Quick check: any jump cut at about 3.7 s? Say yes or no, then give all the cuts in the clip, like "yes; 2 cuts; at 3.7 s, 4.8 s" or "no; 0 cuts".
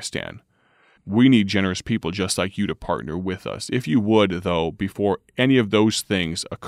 no; 1 cut; at 1.0 s